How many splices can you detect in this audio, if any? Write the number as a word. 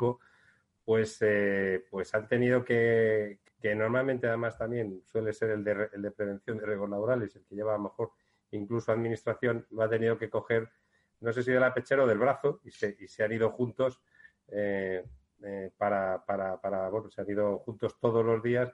one